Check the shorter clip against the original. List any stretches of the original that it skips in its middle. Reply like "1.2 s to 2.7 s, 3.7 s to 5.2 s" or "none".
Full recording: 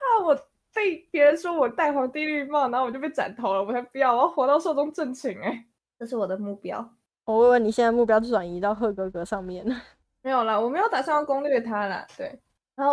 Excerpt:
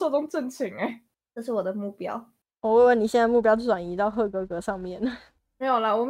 none